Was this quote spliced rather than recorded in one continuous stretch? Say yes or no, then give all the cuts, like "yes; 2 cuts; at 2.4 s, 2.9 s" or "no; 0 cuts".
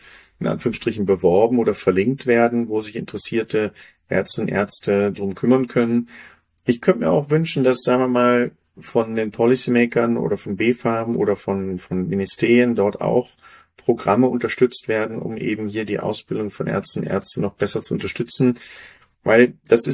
no; 0 cuts